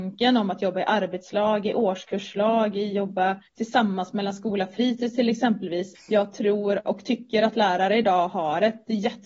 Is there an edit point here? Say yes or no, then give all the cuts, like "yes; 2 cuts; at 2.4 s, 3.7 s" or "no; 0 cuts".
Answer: yes; 2 cuts; at 3.5 s, 6.0 s